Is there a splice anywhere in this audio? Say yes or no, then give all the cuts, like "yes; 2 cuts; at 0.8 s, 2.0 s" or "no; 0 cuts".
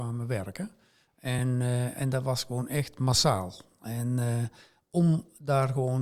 no; 0 cuts